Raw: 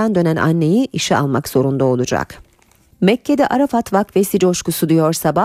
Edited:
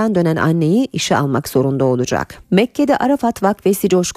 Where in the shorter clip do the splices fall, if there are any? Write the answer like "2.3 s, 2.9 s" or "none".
2.4 s